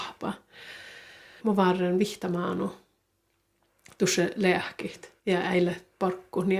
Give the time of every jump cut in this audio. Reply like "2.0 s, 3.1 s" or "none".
1.4 s, 5.2 s

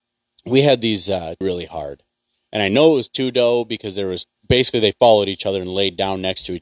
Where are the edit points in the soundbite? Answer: 1.4 s, 4.4 s

